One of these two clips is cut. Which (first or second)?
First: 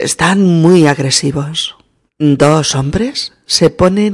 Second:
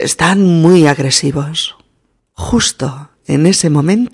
first